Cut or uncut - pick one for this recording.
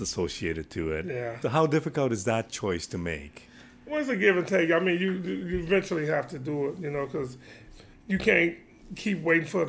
cut